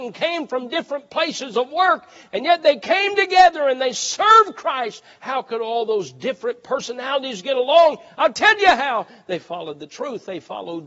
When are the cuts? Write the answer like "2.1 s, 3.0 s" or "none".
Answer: none